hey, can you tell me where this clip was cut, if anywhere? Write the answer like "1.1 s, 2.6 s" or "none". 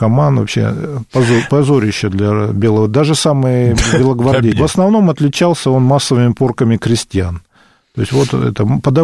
4.5 s